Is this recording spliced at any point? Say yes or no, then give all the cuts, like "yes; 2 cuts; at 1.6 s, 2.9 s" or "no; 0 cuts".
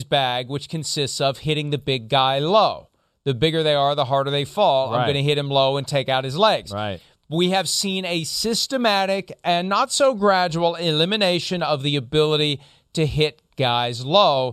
no; 0 cuts